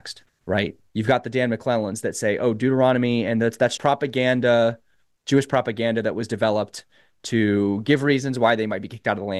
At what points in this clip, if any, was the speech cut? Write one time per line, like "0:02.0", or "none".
0:03.8